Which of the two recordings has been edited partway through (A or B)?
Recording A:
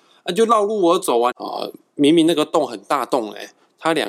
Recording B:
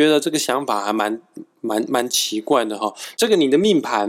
A